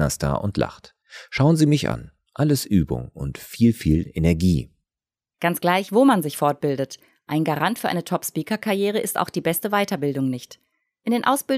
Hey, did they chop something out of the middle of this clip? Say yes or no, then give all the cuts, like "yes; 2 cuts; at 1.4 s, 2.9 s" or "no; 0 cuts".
no; 0 cuts